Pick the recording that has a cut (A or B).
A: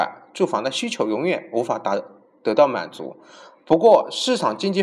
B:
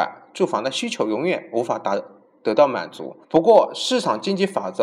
B